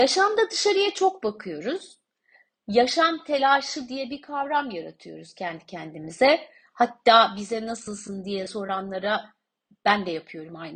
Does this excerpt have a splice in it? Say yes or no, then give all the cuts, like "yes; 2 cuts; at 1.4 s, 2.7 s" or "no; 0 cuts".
no; 0 cuts